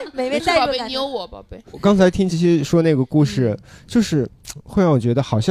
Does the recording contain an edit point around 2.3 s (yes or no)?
yes